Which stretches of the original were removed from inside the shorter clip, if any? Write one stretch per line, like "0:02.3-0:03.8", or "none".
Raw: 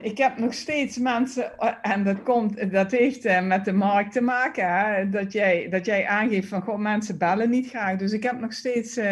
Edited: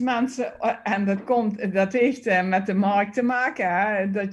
none